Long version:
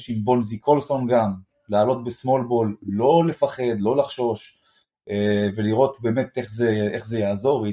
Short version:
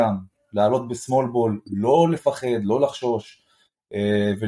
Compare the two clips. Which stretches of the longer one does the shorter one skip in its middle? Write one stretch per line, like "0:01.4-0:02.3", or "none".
none